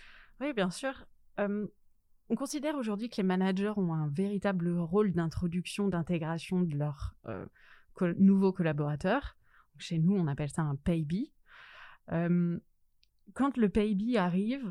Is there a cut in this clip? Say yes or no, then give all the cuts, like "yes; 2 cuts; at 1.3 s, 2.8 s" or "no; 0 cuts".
no; 0 cuts